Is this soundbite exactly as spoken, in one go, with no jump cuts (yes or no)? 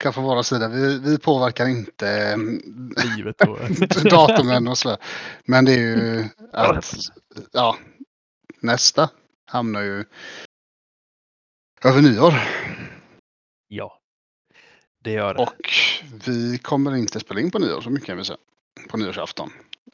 no